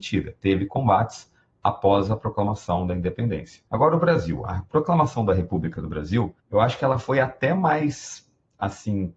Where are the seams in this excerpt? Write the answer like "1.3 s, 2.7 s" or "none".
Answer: 3.7 s, 6.4 s

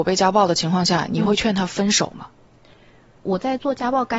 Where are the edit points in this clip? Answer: 3.2 s

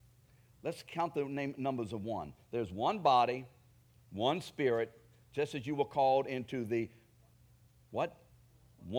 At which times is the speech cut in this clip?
none

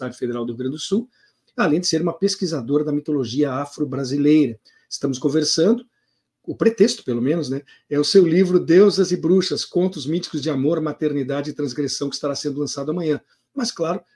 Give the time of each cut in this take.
none

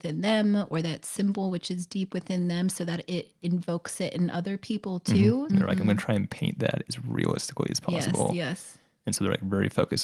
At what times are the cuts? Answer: 5.5 s

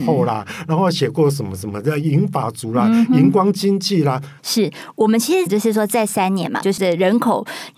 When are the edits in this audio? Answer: 4.4 s, 5.5 s, 6.6 s

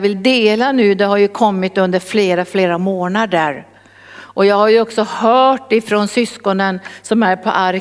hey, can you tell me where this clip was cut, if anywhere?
none

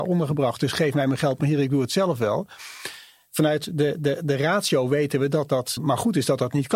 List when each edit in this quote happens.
5.8 s

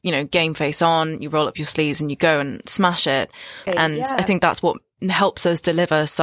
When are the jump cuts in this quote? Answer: 3.7 s

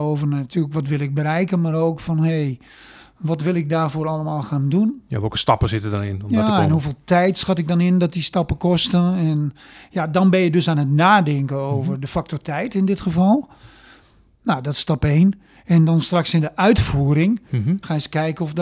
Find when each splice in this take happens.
none

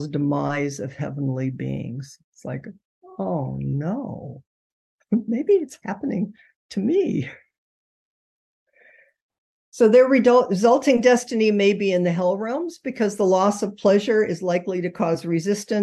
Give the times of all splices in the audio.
none

